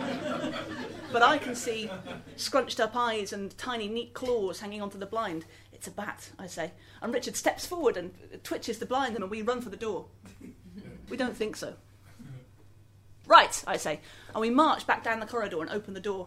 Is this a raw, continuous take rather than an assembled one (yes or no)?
no